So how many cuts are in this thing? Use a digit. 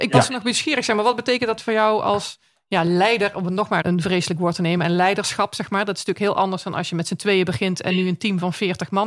1